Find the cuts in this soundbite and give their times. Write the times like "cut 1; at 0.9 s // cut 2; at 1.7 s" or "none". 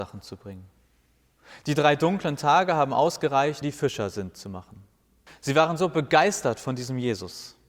cut 1; at 3.6 s // cut 2; at 5.3 s